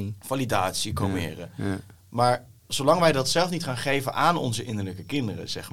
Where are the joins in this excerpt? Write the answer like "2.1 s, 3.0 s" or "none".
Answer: none